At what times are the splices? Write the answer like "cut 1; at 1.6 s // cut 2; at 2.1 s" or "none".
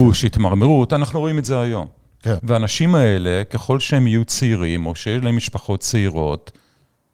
cut 1; at 2.4 s

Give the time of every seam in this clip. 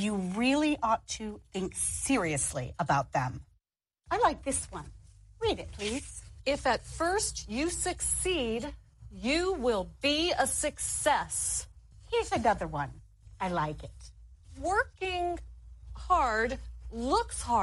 none

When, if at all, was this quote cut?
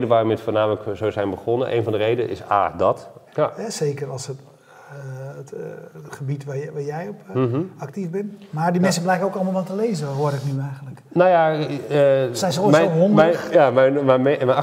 cut 1; at 3.3 s

